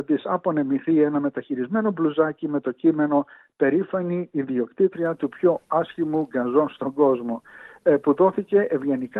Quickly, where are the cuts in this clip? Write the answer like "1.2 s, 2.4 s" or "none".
none